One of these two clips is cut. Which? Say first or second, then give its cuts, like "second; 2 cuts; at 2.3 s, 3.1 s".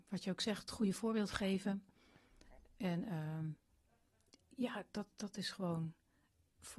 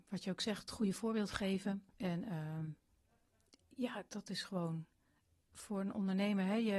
second; 2 cuts; at 1.9 s, 4.1 s